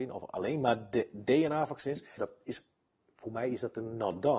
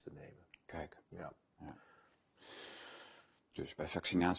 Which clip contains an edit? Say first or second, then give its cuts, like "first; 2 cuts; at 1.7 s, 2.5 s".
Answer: first; 1 cut; at 2.2 s